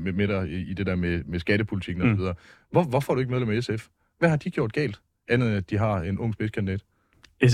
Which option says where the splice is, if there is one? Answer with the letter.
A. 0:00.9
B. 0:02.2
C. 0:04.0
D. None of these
D